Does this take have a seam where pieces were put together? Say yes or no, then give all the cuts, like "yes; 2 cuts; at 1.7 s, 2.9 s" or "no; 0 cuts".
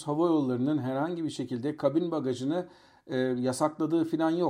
no; 0 cuts